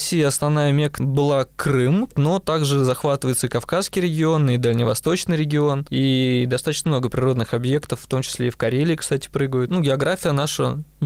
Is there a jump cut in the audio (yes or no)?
yes